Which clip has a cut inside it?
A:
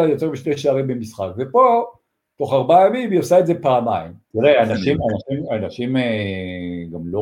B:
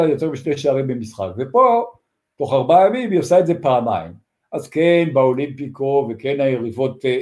A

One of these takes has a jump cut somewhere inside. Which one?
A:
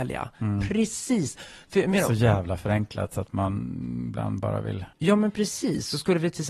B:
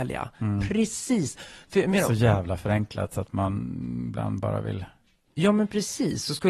A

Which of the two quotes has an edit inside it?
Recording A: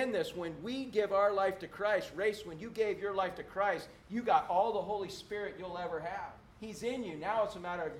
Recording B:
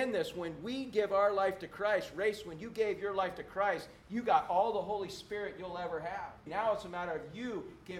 B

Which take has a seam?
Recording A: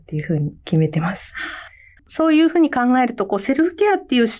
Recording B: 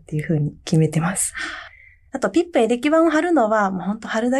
A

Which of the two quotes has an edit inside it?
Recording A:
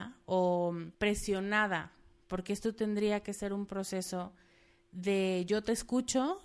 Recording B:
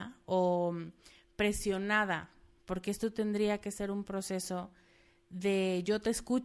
A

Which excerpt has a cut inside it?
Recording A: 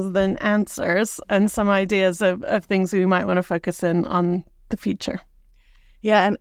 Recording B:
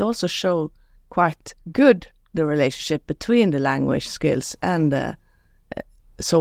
B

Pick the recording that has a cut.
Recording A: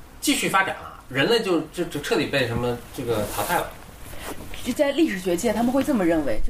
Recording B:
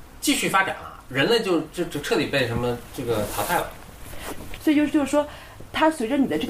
B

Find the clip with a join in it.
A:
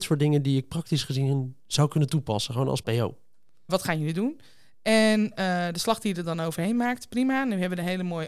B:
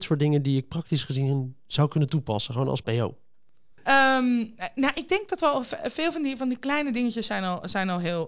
A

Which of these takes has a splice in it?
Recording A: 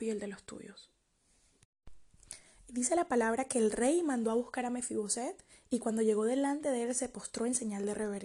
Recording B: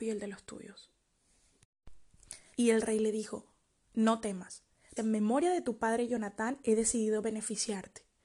B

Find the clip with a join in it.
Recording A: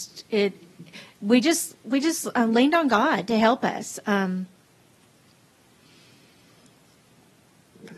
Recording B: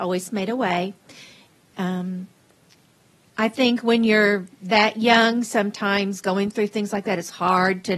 B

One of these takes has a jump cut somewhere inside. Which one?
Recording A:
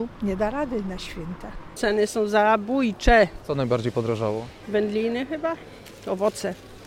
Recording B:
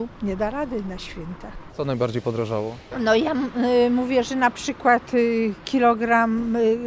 B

